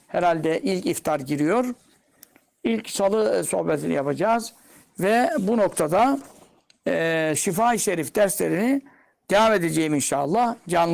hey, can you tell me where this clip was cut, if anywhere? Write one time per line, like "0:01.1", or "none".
0:07.3

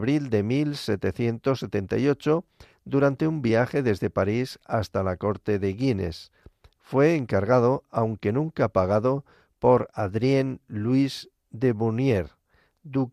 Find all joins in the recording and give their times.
none

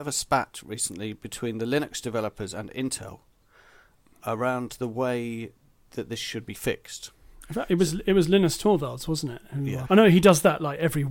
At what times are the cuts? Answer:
0:09.9

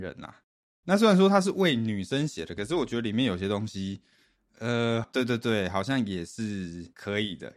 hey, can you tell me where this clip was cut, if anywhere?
0:05.0

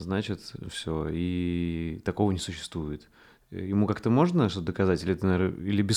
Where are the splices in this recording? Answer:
none

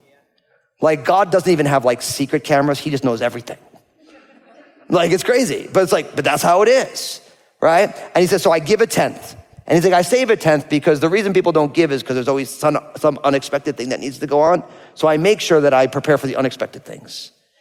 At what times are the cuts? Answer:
none

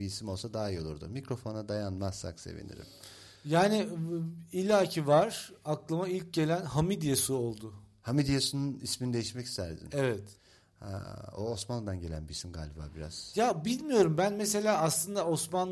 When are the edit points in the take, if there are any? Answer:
none

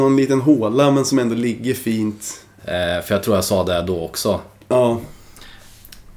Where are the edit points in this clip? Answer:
0:02.6

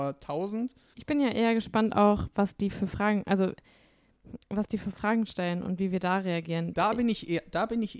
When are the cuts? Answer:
0:00.9

